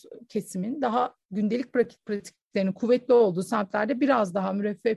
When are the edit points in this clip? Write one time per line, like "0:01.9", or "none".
0:01.2